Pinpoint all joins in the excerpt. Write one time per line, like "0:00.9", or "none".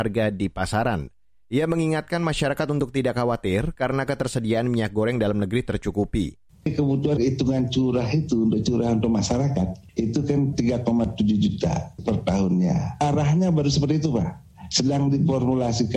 0:06.5